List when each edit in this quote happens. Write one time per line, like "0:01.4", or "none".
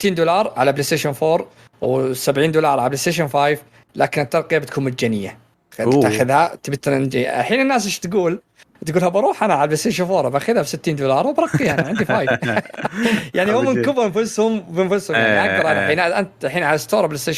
none